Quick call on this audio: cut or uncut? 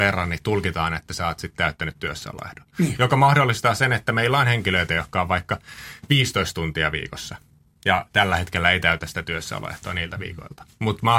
uncut